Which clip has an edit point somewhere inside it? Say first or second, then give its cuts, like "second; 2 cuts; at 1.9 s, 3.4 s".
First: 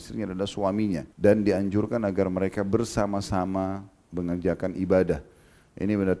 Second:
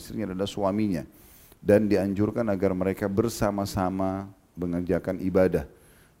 first; 1 cut; at 1.1 s